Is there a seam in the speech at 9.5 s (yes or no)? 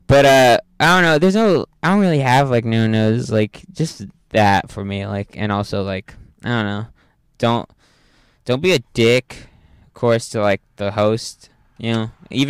no